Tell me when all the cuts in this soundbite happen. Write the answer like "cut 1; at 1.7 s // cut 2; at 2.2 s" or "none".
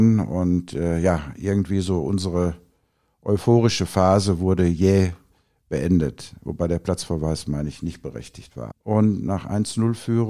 cut 1; at 8.7 s